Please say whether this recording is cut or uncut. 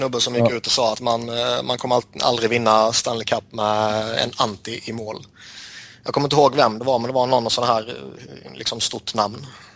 uncut